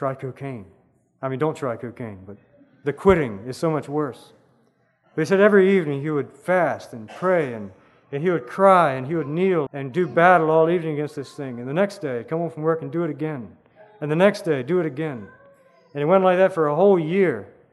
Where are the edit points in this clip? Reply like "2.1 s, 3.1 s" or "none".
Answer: 9.7 s